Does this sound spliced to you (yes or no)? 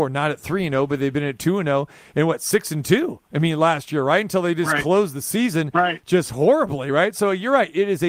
no